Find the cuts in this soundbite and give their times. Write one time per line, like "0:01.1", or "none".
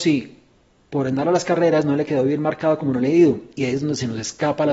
none